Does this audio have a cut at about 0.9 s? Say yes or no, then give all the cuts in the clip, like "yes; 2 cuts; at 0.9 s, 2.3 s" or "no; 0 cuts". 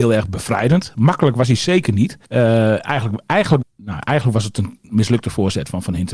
no; 2 cuts; at 2.2 s, 3.6 s